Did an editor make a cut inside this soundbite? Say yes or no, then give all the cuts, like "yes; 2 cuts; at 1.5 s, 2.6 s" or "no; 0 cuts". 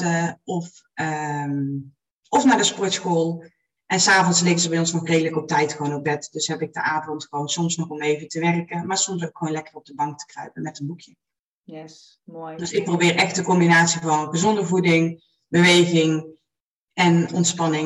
no; 0 cuts